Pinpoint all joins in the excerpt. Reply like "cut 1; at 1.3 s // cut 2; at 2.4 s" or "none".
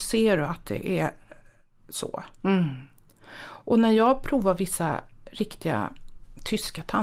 none